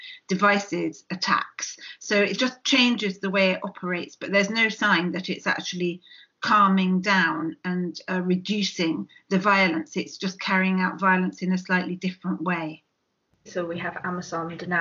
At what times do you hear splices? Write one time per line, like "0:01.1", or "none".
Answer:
0:13.5